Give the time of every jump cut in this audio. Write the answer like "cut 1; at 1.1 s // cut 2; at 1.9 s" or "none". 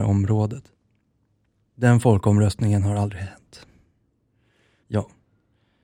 cut 1; at 1.6 s // cut 2; at 4.8 s